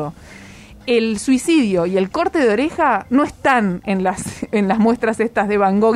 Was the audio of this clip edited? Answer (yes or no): no